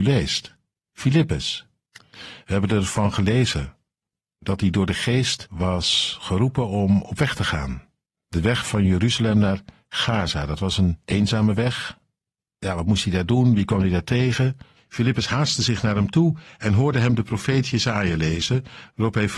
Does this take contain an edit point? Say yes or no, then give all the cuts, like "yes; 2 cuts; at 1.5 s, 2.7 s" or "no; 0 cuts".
yes; 1 cut; at 14.8 s